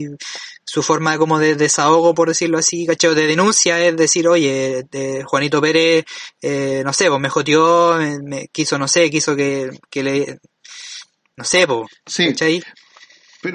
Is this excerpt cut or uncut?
uncut